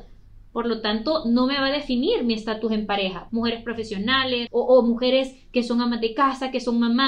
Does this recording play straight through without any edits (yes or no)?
no